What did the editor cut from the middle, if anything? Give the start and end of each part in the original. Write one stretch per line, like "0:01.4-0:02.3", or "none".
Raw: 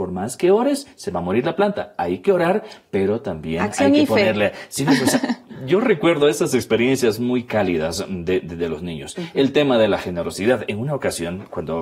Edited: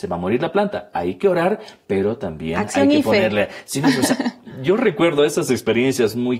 none